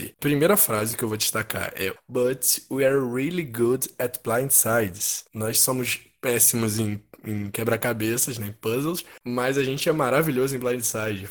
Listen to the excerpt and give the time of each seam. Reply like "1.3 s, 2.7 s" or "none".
2.0 s